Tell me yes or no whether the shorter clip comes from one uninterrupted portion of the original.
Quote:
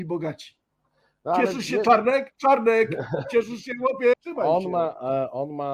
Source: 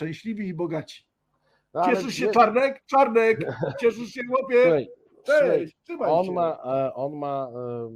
no